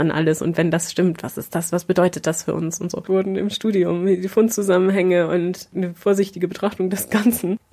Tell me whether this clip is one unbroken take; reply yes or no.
no